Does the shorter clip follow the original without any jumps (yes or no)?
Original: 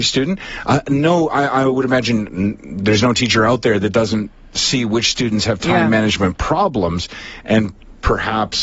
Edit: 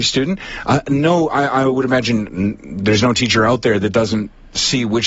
yes